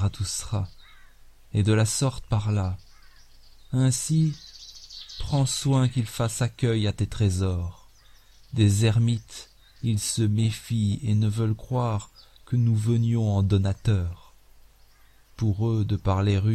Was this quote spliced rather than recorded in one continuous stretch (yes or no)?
no